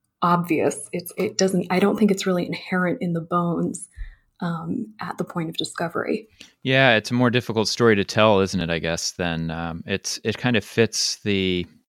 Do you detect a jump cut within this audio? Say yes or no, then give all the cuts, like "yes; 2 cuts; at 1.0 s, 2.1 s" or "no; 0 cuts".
no; 0 cuts